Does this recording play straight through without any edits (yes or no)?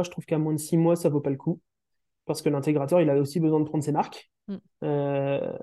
yes